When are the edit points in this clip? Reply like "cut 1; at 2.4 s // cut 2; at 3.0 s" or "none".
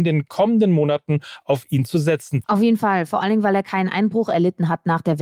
cut 1; at 2.4 s